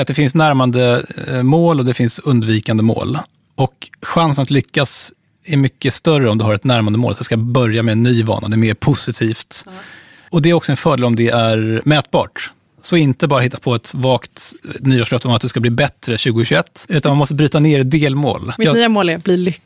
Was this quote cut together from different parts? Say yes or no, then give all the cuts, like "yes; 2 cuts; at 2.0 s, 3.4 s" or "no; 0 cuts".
yes; 2 cuts; at 16.9 s, 18.6 s